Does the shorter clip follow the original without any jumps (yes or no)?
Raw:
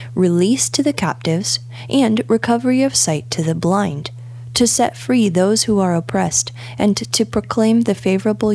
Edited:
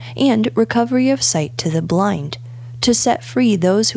yes